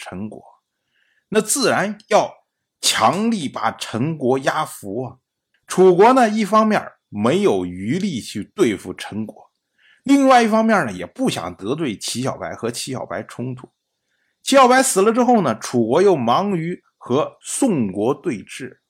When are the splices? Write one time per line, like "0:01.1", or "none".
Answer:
0:05.5
0:17.4

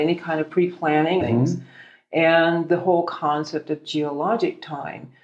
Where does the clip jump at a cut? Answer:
0:01.2

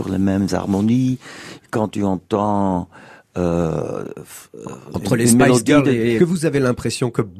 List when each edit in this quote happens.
0:06.2

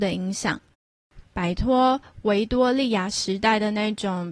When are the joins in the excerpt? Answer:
0:01.2

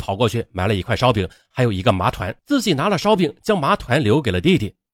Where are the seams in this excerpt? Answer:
0:02.4

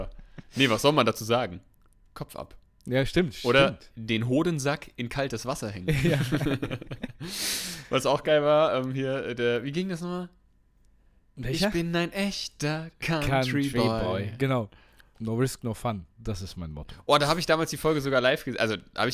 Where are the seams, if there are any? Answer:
none

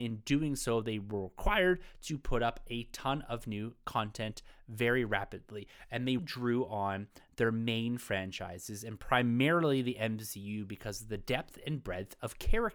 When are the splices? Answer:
0:06.2

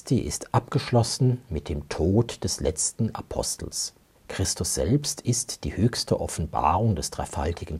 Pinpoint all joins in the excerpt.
0:04.1

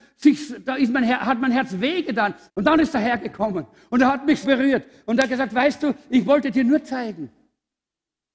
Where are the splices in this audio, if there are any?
0:02.5
0:04.4

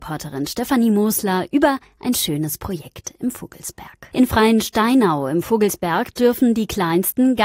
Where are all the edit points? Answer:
0:04.1

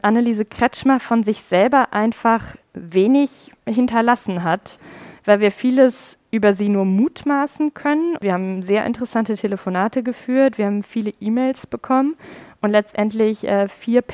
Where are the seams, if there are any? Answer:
0:08.2

